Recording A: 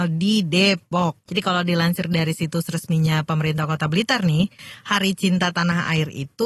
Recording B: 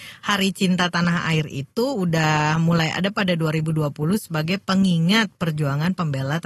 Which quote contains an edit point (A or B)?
A